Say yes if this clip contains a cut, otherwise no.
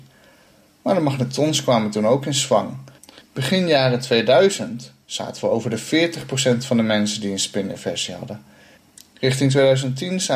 yes